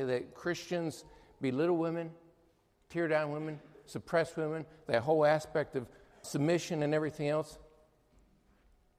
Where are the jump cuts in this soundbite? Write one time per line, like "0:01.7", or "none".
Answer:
0:06.2